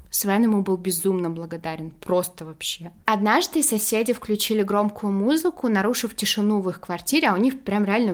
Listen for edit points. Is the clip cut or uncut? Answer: uncut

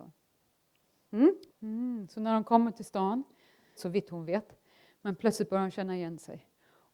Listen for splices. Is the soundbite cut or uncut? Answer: cut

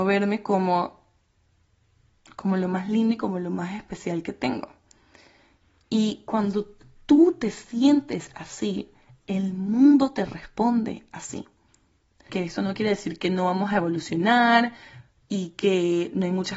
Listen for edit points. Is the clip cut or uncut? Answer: cut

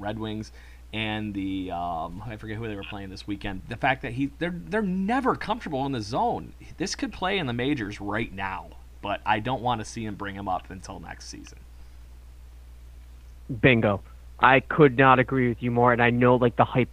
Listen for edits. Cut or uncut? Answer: cut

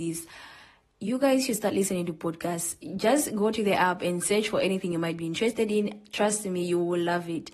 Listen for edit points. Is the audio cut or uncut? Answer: uncut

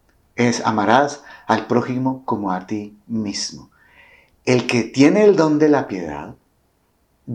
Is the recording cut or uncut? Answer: uncut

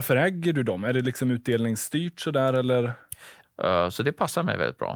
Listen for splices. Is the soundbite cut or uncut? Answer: cut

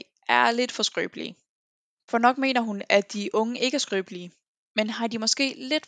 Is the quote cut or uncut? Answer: cut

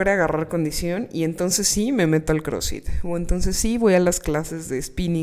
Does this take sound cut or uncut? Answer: uncut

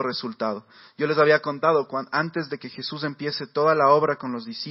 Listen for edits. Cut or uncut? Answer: uncut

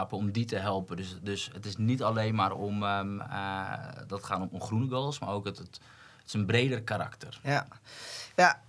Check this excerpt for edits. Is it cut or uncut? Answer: uncut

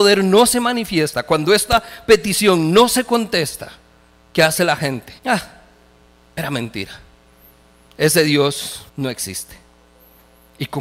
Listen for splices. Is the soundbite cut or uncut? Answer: cut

